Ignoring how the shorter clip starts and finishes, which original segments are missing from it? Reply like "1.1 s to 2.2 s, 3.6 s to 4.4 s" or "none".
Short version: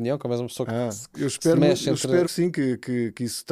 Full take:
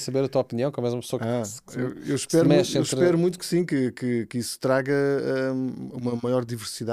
1.7 s to 2.0 s, 3.1 s to 3.4 s